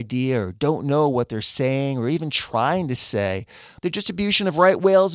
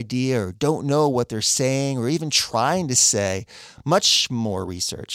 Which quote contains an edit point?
first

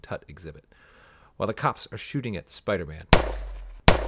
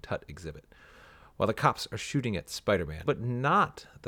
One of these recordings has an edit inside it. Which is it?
second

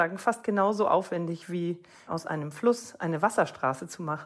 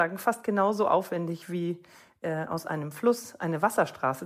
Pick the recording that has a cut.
first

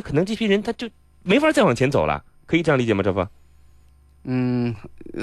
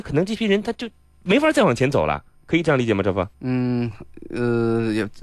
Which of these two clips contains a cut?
second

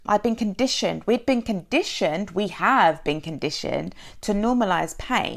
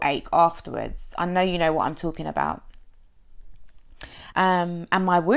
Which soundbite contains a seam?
second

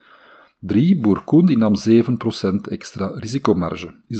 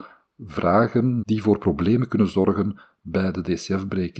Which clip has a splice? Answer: second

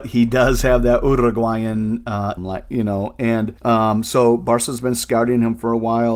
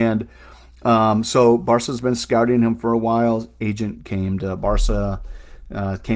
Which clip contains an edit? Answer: first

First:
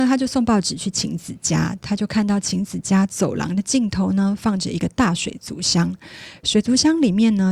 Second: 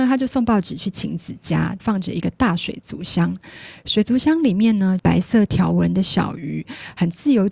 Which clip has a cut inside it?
second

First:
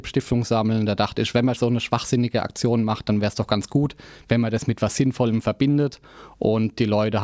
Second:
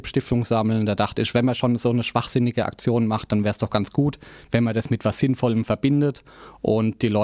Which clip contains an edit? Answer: first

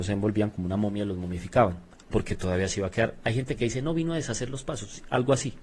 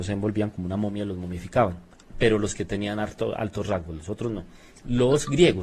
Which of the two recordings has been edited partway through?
first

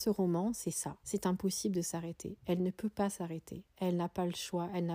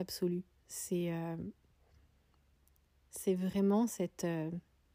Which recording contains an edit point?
first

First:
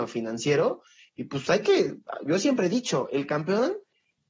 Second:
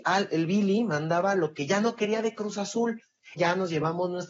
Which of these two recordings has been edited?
second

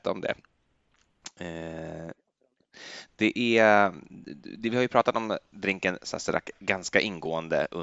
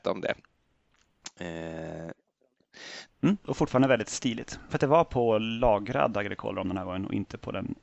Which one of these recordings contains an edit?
second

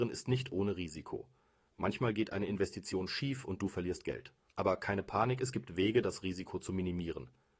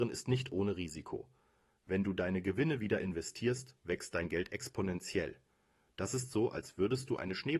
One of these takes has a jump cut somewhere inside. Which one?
second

